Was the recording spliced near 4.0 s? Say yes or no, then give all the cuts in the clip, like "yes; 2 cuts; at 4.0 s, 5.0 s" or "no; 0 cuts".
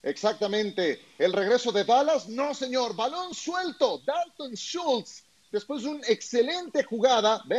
no; 0 cuts